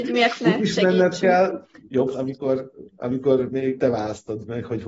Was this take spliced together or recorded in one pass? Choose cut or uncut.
cut